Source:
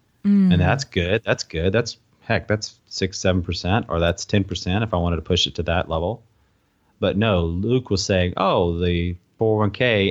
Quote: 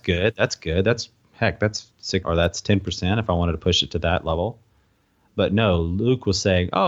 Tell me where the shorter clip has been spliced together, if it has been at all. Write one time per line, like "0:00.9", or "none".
0:02.2